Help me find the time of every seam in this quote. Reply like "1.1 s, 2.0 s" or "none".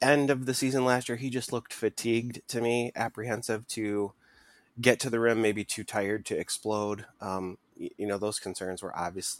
none